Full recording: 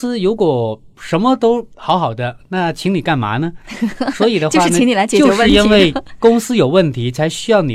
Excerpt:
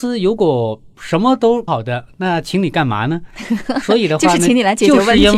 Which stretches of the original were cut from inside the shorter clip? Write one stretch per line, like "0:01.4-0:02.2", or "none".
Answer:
0:01.7-0:02.0